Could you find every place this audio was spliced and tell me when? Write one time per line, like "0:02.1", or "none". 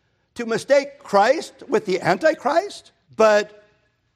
0:03.1